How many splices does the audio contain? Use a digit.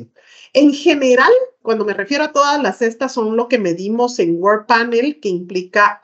1